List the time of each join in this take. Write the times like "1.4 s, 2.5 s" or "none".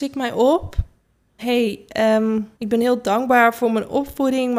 1.4 s, 2.5 s